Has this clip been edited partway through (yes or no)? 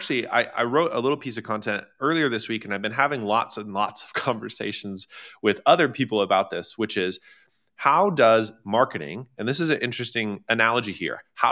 no